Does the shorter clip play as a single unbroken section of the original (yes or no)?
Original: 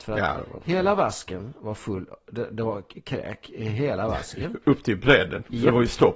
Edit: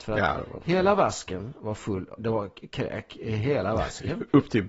no